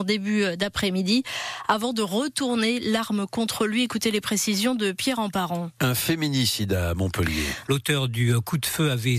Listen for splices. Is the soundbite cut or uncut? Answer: cut